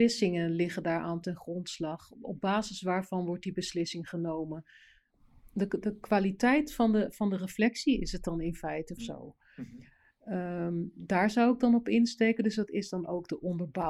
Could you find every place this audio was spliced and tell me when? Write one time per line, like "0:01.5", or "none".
0:09.0